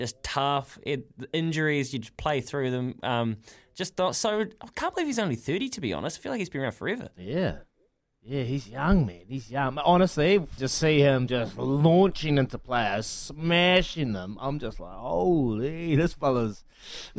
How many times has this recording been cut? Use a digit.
1